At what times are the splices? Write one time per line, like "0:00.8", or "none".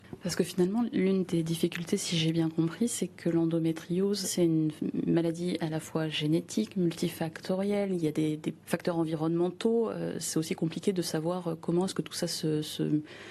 0:04.2